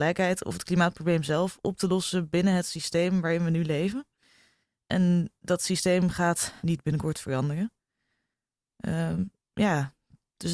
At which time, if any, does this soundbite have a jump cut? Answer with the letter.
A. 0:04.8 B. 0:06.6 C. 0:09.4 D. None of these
B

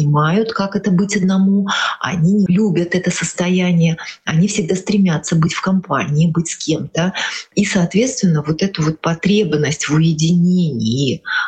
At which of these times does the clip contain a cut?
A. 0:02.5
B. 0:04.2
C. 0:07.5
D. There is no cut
A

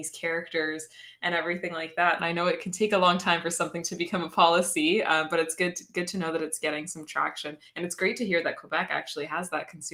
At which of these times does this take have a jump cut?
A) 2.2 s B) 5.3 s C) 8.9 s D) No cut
A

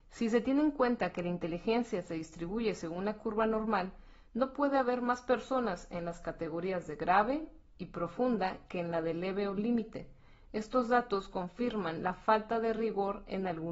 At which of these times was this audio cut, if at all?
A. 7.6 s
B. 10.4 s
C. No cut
C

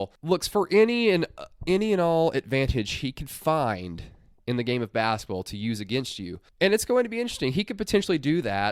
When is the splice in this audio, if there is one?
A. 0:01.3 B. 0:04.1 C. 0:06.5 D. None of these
D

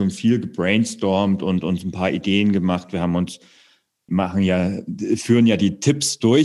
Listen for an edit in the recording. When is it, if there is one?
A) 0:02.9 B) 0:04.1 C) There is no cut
B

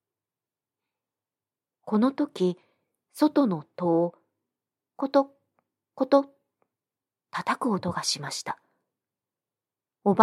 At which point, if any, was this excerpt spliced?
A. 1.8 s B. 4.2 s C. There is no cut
C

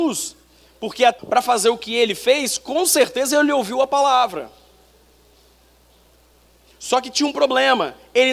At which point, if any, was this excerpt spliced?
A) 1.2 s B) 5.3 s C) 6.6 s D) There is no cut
A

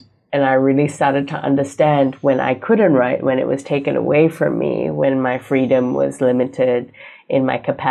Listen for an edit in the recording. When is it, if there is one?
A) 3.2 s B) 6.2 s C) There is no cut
C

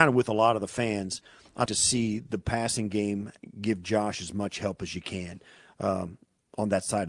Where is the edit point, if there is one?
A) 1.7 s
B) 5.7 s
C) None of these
A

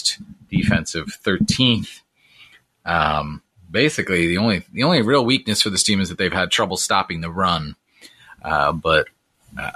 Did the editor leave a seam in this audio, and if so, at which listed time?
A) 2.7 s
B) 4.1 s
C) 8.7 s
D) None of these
D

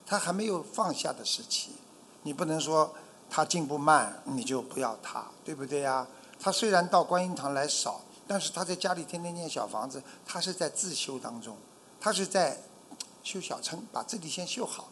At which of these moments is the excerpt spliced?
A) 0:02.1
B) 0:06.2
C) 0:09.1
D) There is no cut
D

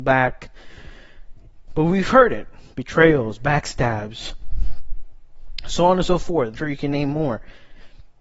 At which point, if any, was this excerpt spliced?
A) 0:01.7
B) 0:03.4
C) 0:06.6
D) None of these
C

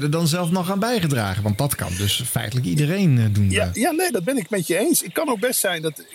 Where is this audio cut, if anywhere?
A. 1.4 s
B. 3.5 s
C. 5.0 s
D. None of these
D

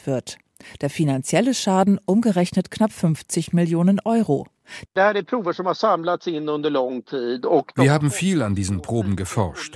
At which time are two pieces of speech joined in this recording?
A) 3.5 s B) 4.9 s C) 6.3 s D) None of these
B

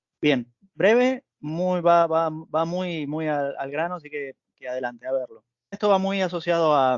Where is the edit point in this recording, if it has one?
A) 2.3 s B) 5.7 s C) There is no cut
B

